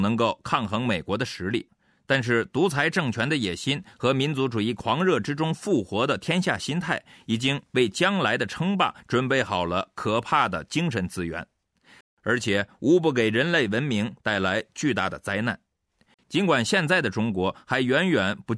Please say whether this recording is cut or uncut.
cut